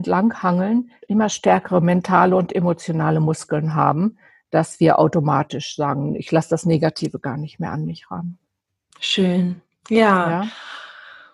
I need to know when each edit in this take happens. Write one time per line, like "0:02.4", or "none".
0:01.0